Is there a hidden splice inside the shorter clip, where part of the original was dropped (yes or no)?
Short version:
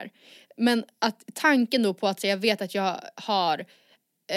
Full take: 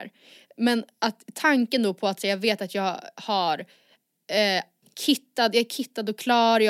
no